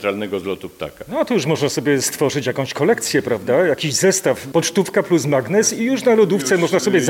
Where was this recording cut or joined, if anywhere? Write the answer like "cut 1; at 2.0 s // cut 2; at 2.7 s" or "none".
cut 1; at 4.5 s